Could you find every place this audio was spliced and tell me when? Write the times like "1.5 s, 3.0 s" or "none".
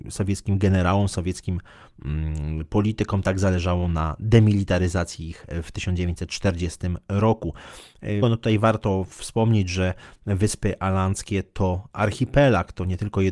8.2 s